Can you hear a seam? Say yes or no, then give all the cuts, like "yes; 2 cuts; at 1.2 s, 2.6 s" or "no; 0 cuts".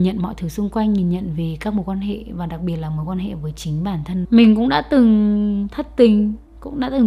yes; 1 cut; at 4.2 s